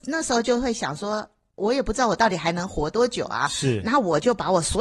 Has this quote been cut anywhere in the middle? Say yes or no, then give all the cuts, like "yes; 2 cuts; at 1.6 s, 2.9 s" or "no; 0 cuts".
no; 0 cuts